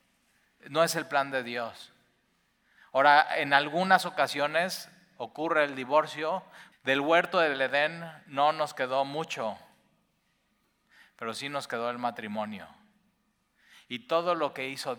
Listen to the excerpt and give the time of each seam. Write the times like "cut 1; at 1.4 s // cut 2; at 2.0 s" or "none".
cut 1; at 6.7 s